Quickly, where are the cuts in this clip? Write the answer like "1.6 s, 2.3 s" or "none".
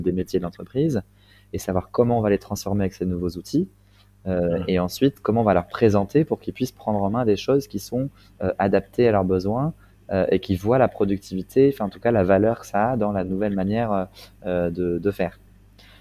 none